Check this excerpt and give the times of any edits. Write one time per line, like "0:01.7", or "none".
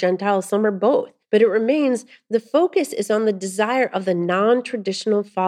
0:01.2